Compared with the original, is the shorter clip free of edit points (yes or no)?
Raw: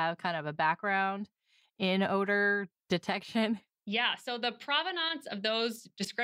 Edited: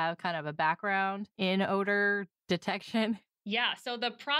no